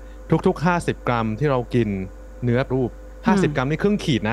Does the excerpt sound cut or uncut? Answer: cut